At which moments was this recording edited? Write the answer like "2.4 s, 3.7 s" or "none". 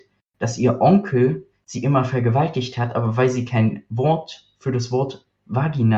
none